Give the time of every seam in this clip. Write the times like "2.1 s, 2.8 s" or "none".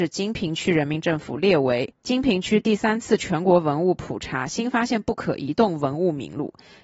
none